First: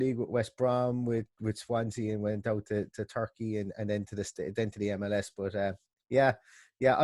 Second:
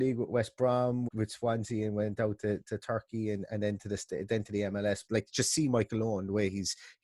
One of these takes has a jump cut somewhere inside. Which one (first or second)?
second